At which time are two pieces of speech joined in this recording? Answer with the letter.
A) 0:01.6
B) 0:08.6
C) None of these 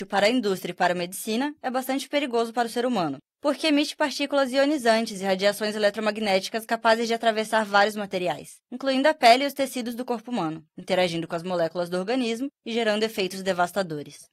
B